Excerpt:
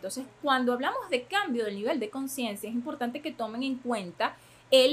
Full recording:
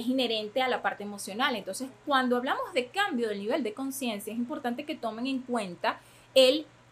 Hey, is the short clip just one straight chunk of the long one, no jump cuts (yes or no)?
yes